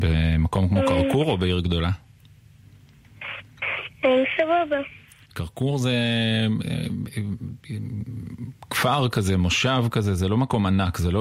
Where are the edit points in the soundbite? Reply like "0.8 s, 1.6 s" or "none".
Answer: 3.9 s